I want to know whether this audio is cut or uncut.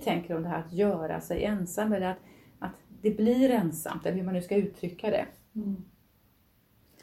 uncut